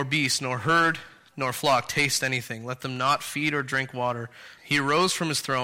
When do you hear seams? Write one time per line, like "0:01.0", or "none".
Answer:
0:04.6